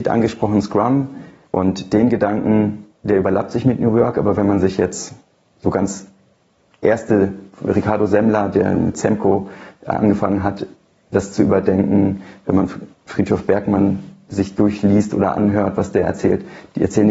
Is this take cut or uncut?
cut